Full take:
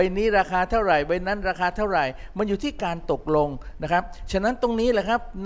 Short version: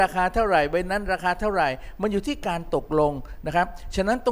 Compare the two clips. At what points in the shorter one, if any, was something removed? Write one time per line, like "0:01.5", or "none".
none